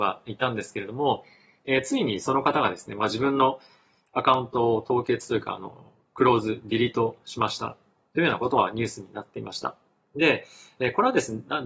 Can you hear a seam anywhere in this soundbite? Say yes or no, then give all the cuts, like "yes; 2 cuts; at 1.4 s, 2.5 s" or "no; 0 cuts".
no; 0 cuts